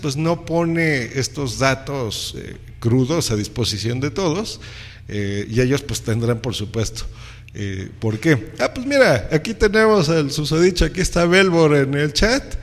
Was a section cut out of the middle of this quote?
no; 0 cuts

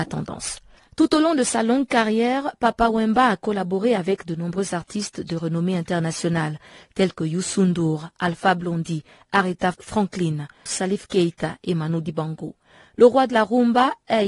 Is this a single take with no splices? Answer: no; 1 cut; at 10.7 s

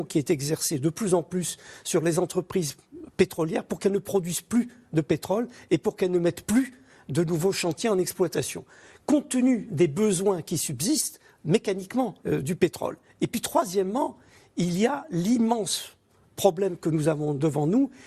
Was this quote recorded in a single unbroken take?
no; 1 cut; at 12.2 s

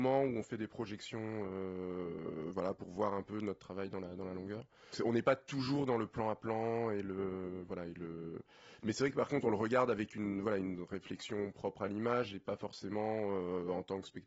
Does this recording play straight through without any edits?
no; 1 cut; at 4.9 s

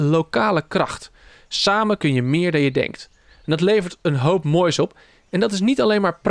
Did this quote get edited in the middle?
no; 0 cuts

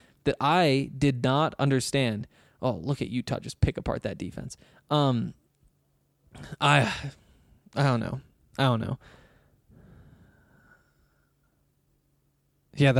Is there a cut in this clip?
no; 0 cuts

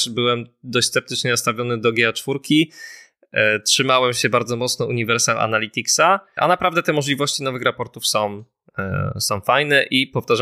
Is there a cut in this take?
yes; 1 cut; at 6.4 s

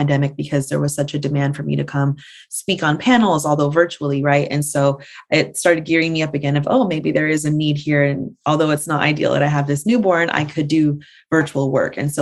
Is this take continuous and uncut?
yes; 0 cuts

